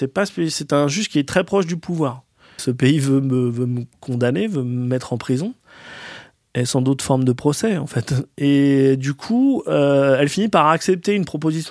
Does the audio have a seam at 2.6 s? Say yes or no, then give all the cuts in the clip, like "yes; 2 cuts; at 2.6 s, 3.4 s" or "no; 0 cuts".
yes; 1 cut; at 2.6 s